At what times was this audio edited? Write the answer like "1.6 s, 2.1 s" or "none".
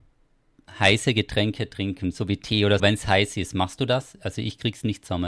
2.8 s